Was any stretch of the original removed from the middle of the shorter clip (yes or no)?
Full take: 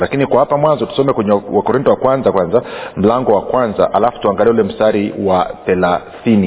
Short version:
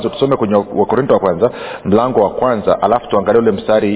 yes